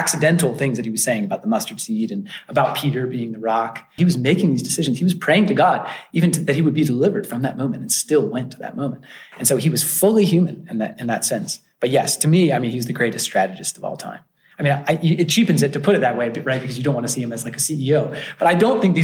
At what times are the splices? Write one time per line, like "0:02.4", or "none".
0:04.0